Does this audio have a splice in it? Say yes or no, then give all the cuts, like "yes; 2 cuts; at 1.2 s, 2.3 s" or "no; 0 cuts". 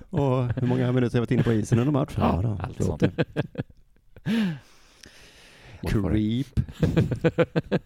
yes; 2 cuts; at 3.0 s, 5.8 s